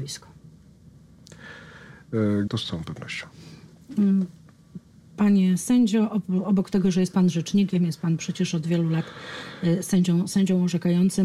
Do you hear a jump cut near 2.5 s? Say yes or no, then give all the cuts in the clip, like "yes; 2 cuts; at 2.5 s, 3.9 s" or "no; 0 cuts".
yes; 1 cut; at 2.5 s